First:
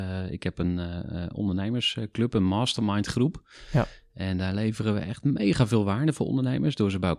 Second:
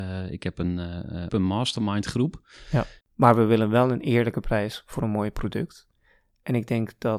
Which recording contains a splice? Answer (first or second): second